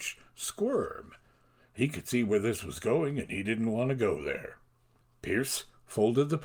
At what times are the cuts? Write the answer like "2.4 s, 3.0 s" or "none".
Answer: none